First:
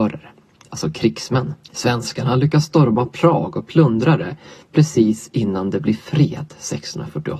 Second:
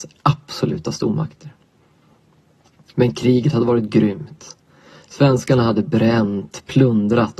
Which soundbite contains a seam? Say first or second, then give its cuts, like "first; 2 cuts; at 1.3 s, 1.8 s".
first; 1 cut; at 1.6 s